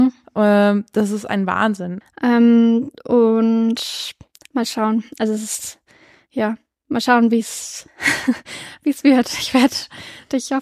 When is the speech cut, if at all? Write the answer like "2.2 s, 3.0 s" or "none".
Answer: 2.0 s